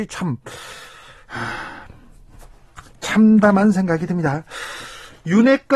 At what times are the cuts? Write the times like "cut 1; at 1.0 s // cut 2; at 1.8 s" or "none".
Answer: none